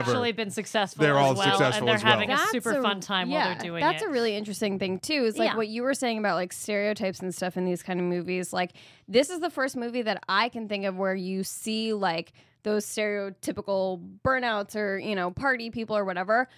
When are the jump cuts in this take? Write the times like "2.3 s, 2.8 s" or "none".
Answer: none